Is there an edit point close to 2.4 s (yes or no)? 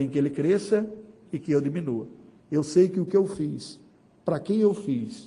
yes